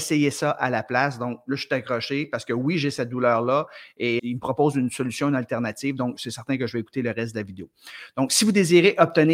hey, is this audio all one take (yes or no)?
no